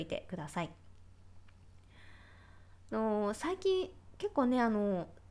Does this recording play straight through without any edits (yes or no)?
no